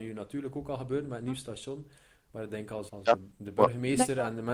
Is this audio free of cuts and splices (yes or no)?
no